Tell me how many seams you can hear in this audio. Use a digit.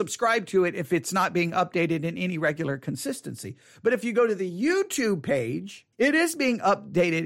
1